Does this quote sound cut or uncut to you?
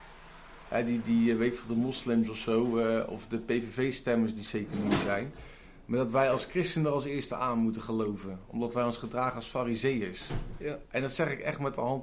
uncut